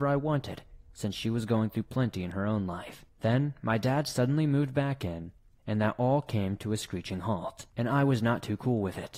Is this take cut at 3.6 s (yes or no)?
no